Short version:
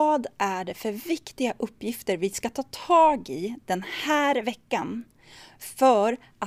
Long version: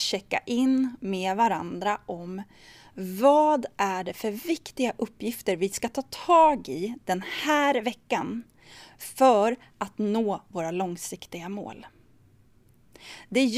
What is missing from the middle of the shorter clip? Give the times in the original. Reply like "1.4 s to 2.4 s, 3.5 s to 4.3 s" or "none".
none